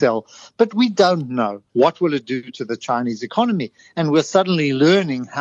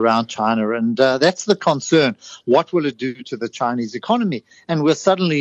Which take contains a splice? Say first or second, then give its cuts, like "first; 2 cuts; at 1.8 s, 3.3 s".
first; 1 cut; at 1.7 s